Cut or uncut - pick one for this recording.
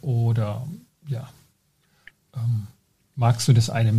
uncut